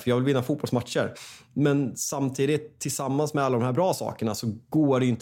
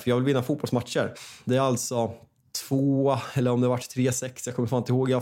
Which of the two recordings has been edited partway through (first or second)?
second